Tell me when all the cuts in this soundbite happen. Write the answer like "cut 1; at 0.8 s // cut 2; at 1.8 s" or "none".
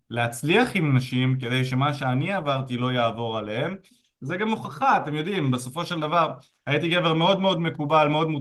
none